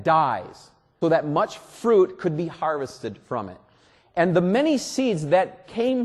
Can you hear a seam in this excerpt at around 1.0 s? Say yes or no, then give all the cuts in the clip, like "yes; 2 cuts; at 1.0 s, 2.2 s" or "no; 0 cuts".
yes; 1 cut; at 1.0 s